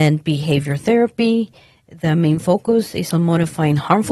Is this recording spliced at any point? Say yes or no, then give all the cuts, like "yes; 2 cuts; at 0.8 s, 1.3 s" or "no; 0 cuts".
no; 0 cuts